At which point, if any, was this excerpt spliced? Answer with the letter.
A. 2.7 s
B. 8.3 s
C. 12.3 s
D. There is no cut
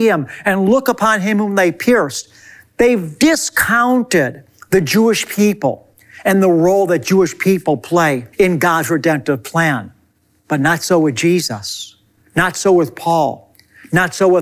B